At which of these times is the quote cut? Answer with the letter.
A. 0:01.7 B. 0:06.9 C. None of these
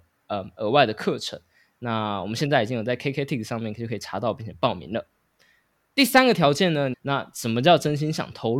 B